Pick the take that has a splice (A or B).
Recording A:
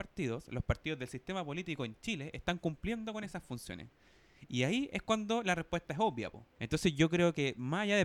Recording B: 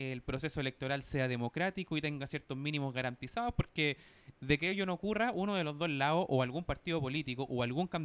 A